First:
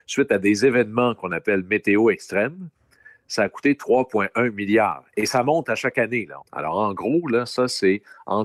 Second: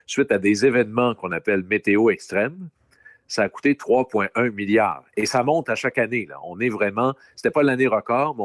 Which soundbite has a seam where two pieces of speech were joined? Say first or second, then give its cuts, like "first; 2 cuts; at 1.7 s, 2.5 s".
first; 1 cut; at 6.4 s